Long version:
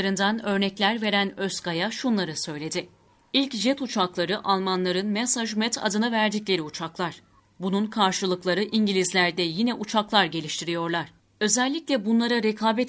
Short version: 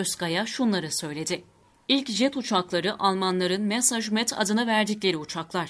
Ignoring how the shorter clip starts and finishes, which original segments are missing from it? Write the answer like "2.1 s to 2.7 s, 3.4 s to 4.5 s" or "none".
none